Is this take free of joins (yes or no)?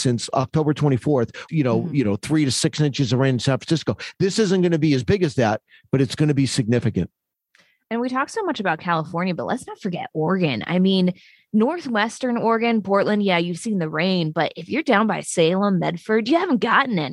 no